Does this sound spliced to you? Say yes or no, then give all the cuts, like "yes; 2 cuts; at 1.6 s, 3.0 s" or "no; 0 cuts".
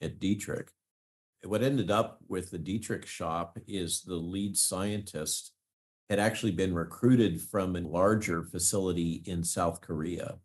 yes; 2 cuts; at 1.4 s, 7.8 s